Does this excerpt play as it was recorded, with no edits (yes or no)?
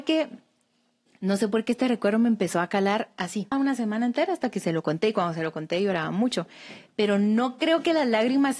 no